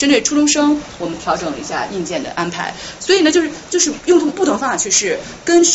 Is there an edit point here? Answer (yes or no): yes